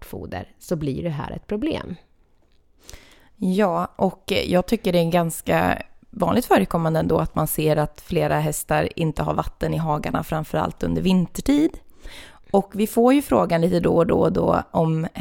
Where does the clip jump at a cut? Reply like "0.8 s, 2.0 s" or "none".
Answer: none